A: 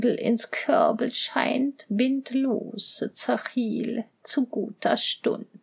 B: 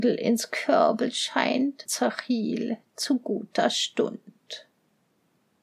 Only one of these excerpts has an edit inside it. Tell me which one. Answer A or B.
B